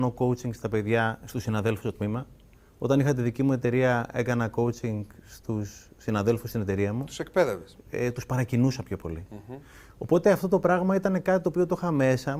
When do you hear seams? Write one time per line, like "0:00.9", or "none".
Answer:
0:07.8